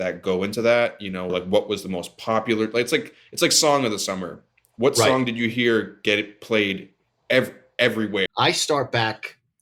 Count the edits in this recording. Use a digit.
2